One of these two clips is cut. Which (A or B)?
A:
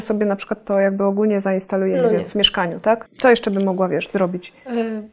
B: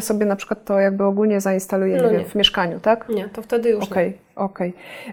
A